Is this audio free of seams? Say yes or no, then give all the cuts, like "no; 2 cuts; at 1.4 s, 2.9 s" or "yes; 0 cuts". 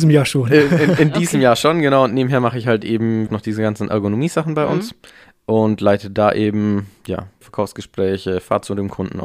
no; 2 cuts; at 3.3 s, 7.4 s